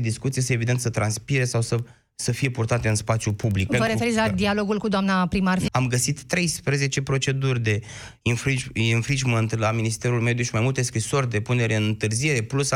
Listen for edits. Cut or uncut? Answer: cut